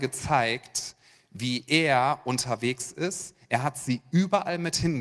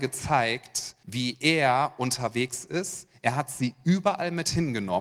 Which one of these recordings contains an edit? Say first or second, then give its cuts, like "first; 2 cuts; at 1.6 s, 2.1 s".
second; 1 cut; at 1.0 s